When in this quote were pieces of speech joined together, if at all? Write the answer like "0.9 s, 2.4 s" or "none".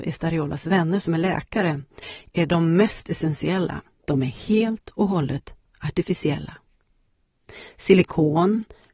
4.0 s